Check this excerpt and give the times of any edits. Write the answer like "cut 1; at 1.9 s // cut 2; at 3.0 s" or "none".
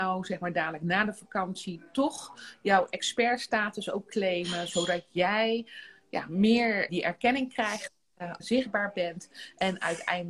cut 1; at 6.9 s // cut 2; at 8.4 s